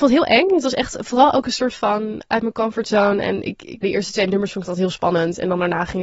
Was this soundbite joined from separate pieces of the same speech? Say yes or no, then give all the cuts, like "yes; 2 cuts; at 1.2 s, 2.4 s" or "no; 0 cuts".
yes; 1 cut; at 3.8 s